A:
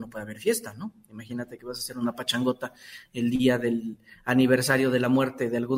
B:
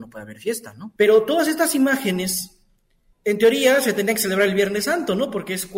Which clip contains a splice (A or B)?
B